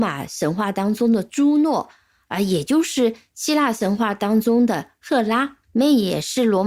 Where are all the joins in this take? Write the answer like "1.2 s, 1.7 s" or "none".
5.6 s